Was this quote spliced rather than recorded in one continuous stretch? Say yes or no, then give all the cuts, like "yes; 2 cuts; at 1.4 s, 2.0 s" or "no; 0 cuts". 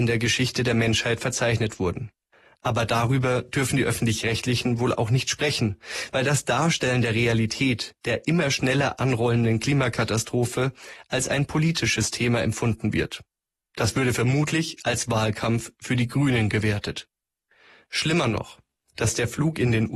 yes; 1 cut; at 18.9 s